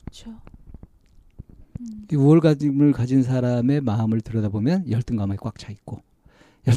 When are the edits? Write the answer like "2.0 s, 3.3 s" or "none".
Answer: none